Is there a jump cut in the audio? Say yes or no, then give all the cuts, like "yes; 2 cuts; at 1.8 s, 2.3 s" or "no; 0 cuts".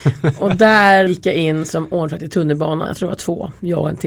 yes; 2 cuts; at 1.1 s, 2.9 s